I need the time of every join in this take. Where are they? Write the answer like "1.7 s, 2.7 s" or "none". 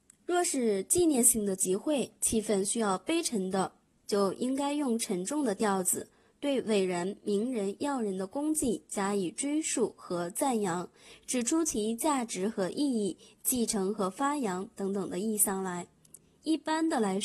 none

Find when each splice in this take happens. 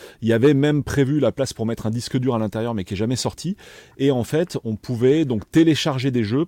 none

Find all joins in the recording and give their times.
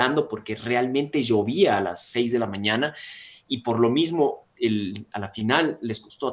4.5 s

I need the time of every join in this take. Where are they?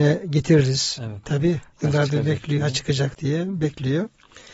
1.2 s

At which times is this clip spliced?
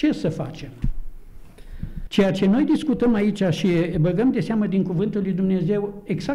2.1 s

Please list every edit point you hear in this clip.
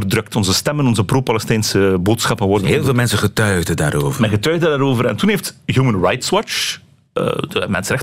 none

